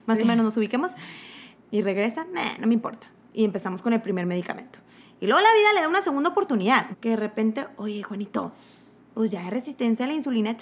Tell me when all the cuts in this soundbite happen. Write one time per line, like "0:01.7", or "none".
0:01.5
0:06.9

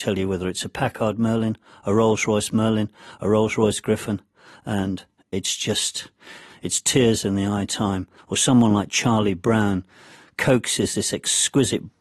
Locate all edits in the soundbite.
0:06.5
0:08.2

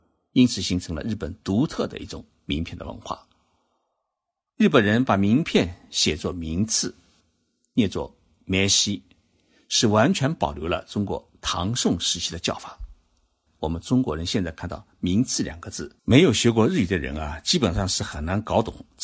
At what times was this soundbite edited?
0:13.5
0:16.0

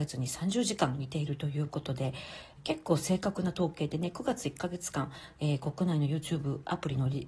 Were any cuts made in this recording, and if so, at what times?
0:02.6

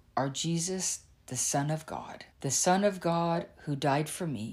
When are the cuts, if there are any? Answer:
0:02.3

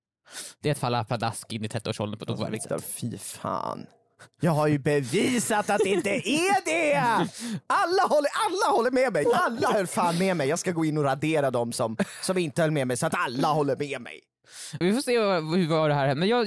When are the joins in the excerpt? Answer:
0:09.2
0:14.8

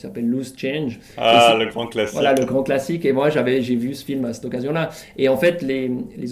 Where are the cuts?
none

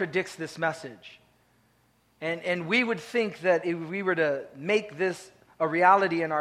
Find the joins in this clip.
none

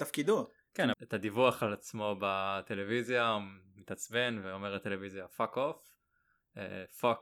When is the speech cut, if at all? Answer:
0:00.9

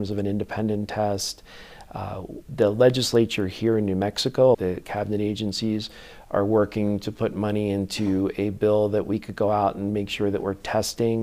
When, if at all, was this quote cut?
0:02.4
0:04.5

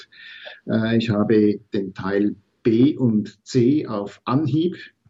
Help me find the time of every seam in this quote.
none

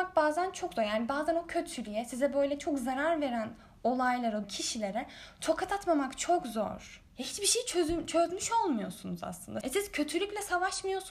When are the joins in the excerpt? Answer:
0:04.4
0:07.1
0:09.6

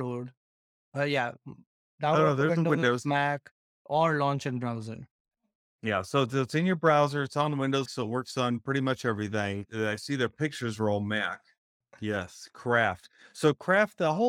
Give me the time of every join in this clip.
0:07.9
0:09.7
0:11.8

